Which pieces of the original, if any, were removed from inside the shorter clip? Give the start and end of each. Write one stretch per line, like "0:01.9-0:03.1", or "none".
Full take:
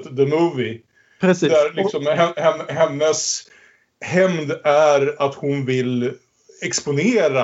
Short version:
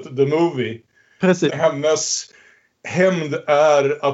0:01.5-0:02.7